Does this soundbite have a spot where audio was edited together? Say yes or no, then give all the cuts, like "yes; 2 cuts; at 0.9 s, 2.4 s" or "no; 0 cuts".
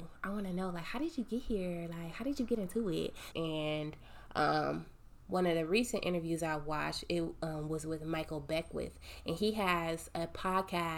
yes; 1 cut; at 3.3 s